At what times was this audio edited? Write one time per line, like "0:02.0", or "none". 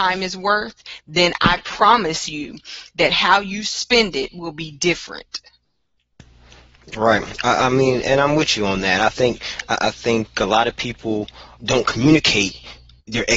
0:08.0
0:11.6